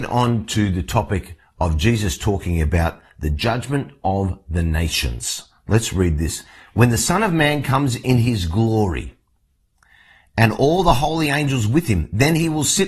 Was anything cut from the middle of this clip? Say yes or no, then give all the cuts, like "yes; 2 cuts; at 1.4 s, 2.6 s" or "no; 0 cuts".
no; 0 cuts